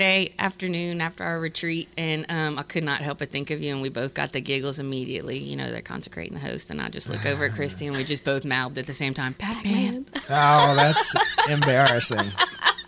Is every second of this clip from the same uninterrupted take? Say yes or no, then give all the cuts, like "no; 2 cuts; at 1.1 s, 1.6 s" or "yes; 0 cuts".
yes; 0 cuts